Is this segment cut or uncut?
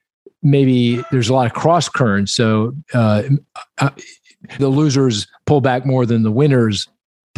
cut